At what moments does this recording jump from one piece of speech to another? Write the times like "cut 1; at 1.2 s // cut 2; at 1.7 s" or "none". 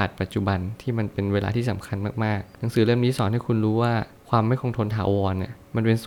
none